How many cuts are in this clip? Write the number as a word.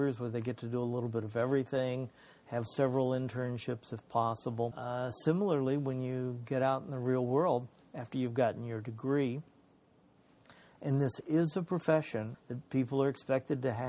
two